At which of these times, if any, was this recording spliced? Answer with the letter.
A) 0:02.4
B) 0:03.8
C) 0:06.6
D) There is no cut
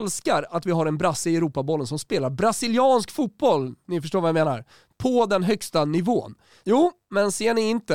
C